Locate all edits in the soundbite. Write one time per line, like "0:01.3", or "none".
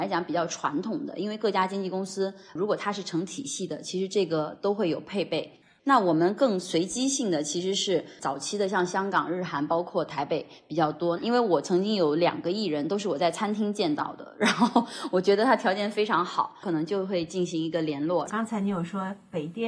0:11.2
0:18.3